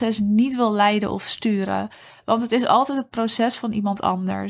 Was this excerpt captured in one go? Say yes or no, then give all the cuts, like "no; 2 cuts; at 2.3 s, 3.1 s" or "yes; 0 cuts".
yes; 0 cuts